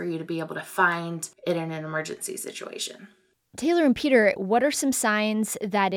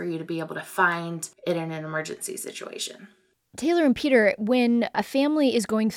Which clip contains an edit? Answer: first; 1 cut; at 4.4 s

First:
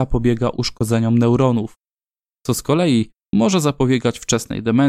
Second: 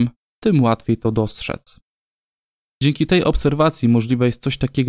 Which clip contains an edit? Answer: second; 1 cut; at 2.7 s

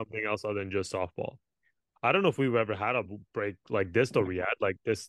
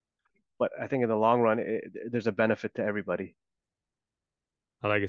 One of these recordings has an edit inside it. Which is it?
first; 1 cut; at 1.9 s

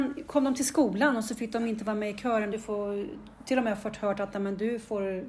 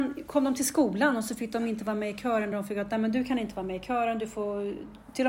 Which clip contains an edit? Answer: first; 1 cut; at 2.5 s

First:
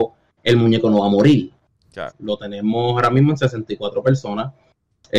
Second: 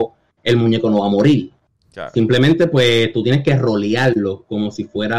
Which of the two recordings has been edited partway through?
first; 1 cut; at 2.1 s

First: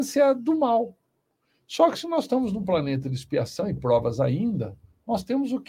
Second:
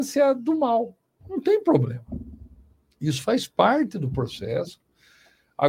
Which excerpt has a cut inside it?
second; 1 cut; at 1.2 s

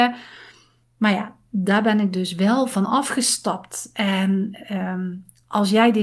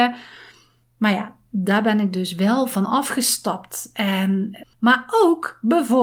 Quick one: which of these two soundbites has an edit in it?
second; 1 cut; at 4.6 s

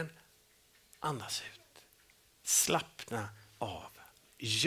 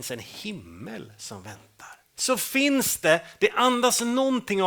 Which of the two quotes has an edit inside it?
second; 1 cut; at 2.2 s

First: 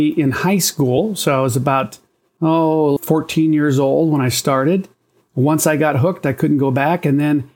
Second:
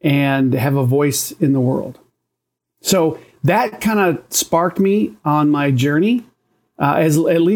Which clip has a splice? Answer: first; 2 cuts; at 3.0 s, 5.2 s

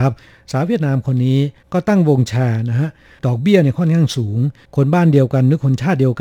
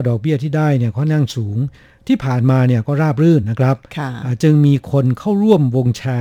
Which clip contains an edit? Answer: second; 1 cut; at 3.4 s

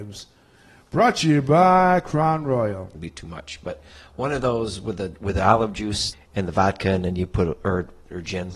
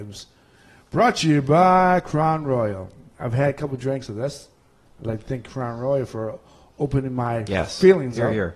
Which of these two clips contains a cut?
first; 2 cuts; at 2.9 s, 6.1 s

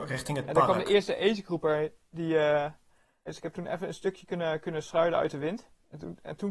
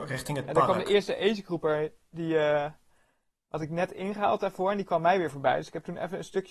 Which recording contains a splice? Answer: first; 1 cut; at 3.3 s

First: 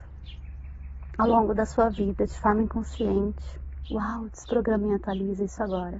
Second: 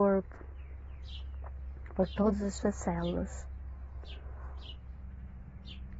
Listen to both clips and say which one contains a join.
first; 1 cut; at 3.9 s

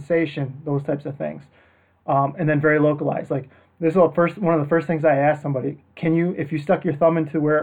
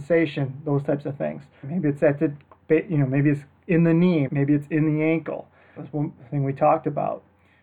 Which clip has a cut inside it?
second; 3 cuts; at 1.6 s, 4.3 s, 5.8 s

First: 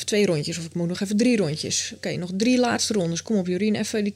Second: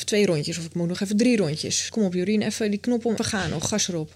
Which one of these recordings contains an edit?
second; 2 cuts; at 1.9 s, 3.2 s

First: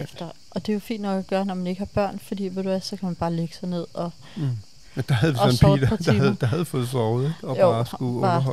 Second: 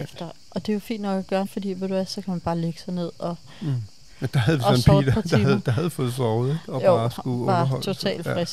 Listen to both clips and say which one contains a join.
second; 1 cut; at 1.4 s

